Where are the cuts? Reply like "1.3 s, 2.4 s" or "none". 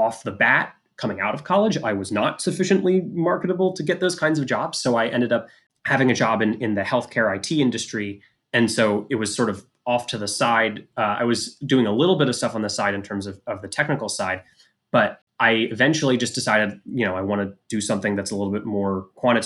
none